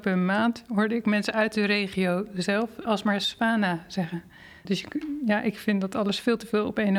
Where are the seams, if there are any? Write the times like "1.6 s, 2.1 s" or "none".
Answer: 2.9 s, 4.7 s